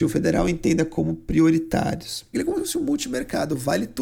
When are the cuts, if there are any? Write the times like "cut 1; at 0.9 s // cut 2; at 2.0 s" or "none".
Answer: cut 1; at 2.3 s